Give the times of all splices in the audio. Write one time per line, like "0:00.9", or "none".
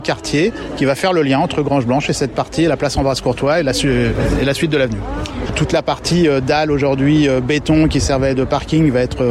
0:05.5